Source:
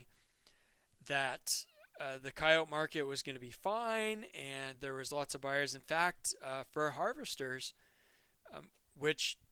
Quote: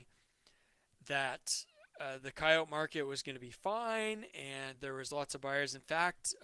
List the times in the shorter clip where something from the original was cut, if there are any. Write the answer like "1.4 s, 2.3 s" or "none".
none